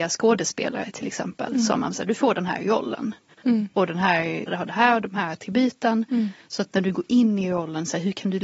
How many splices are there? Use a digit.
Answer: 1